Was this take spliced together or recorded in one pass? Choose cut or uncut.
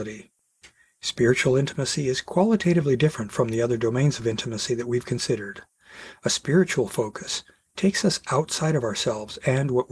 uncut